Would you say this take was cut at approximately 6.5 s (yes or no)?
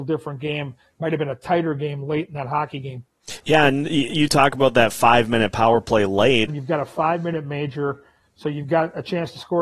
yes